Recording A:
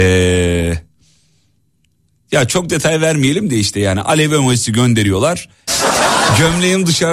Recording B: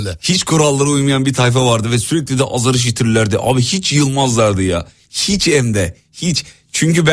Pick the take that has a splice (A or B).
A